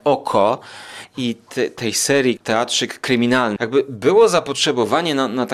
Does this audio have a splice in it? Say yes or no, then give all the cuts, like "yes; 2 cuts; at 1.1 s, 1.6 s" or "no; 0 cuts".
yes; 2 cuts; at 2.4 s, 3.6 s